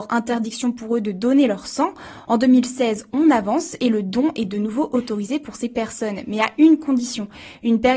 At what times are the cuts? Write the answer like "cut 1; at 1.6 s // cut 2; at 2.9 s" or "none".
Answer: none